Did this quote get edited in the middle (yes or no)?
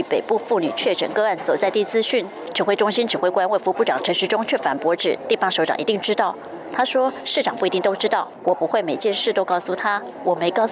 yes